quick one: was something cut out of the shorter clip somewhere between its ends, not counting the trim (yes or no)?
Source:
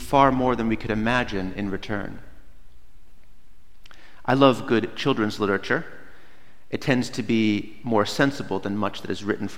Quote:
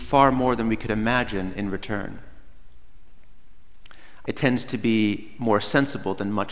yes